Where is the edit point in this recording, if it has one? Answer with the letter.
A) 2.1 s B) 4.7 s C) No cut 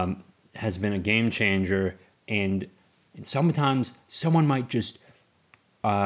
A